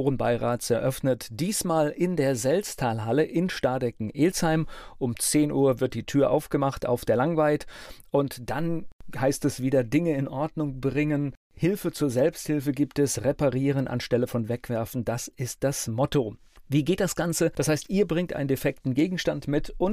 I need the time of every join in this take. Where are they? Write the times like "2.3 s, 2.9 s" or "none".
none